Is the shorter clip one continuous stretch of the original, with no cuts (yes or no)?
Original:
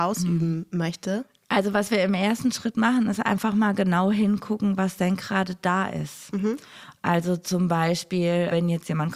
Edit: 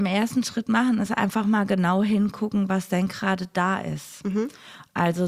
yes